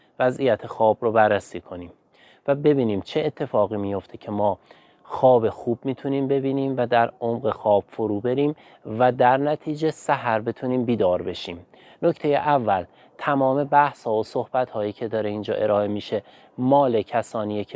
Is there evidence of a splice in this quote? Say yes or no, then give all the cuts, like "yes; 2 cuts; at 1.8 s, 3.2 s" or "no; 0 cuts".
no; 0 cuts